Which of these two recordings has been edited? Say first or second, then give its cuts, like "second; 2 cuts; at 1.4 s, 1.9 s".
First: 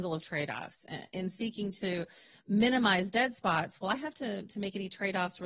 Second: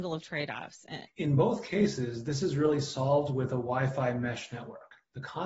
second; 1 cut; at 1.1 s